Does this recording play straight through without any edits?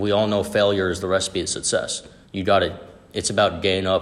no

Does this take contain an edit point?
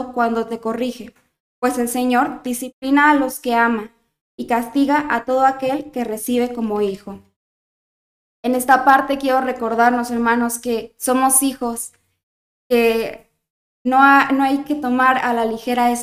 no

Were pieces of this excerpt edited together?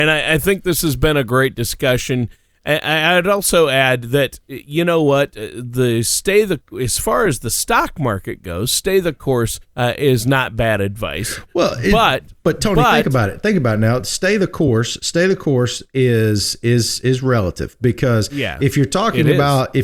yes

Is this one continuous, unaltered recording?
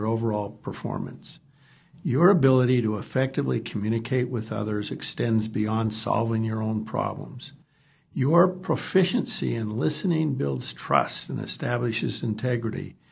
yes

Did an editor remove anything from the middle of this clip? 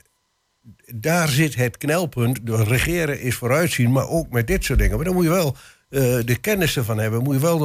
no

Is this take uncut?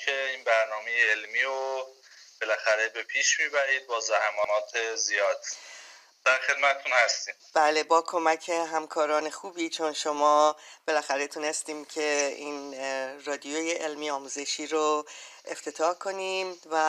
yes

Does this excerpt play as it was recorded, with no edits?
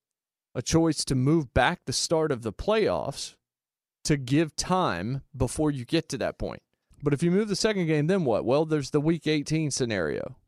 no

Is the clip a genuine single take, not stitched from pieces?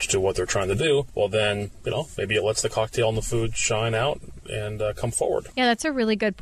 yes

